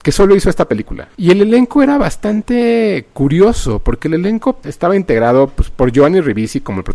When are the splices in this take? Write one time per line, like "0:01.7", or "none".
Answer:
0:01.1